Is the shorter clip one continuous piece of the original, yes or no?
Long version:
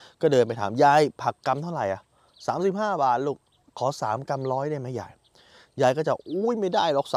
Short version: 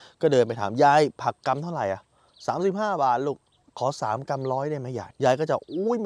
no